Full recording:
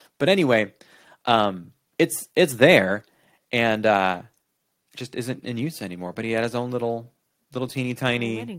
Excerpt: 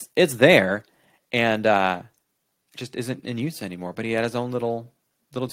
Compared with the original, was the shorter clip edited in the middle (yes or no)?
no